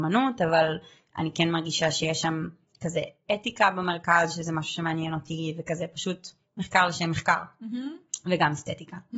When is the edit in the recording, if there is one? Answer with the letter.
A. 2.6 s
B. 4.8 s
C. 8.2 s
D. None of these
D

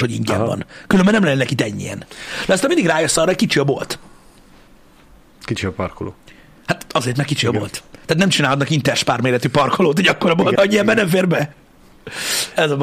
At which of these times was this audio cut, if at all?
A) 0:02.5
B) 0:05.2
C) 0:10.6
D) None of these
C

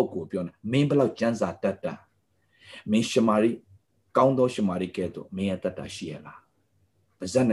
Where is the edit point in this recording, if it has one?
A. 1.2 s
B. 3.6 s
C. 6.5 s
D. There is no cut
D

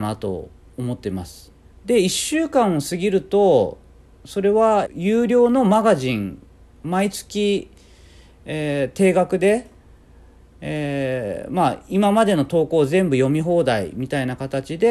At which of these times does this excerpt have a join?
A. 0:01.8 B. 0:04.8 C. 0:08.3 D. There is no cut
B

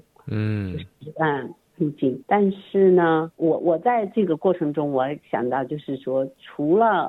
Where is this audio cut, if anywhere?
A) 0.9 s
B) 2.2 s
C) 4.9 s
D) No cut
B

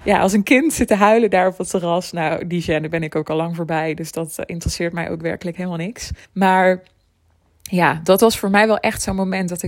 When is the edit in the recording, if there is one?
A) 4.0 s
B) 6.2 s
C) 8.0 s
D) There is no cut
B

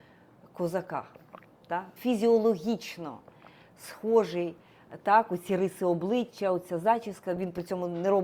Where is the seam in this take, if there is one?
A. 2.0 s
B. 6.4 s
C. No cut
A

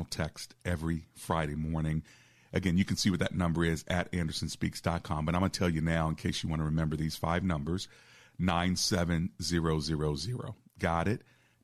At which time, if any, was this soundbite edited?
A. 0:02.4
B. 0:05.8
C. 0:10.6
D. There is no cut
D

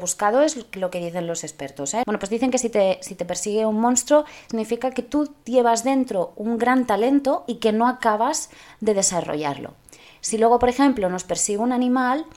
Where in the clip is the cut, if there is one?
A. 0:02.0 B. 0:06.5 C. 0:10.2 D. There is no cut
A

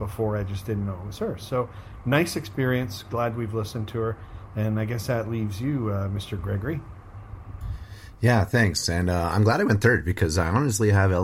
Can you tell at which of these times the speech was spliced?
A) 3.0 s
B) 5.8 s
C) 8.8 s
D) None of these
D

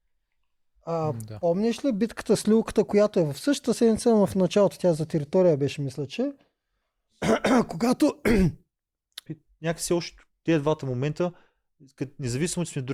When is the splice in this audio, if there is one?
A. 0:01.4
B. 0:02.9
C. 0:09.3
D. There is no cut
C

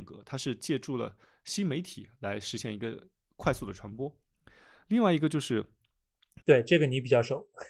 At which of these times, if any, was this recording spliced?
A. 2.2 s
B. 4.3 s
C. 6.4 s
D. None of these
C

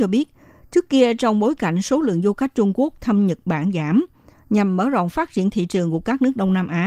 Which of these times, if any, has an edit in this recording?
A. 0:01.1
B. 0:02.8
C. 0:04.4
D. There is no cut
D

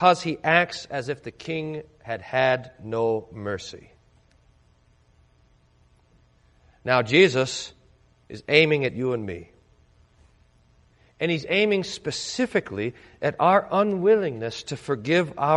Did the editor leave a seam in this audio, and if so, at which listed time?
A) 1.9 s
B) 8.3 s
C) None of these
B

